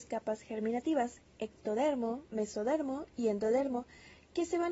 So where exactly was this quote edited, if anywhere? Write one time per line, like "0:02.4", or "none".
none